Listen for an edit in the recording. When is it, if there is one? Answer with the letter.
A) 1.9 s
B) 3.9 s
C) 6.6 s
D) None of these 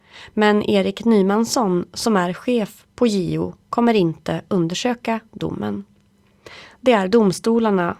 D